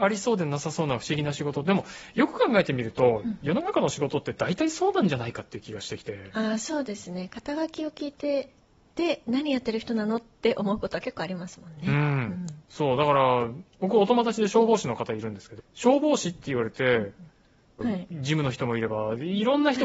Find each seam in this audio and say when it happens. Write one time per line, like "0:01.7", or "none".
0:15.6
0:17.8